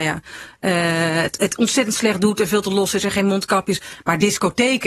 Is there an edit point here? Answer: no; 0 cuts

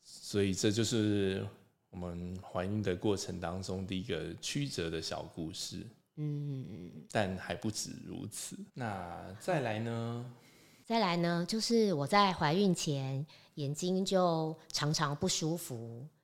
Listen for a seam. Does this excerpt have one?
yes; 1 cut; at 8.7 s

